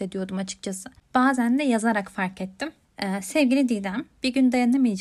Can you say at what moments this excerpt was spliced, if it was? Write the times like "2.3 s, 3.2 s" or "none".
1.0 s, 2.8 s